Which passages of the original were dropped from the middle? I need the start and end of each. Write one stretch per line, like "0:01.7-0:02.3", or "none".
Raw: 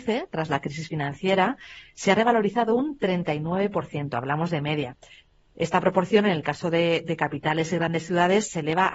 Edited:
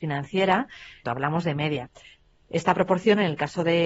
0:01.9-0:04.1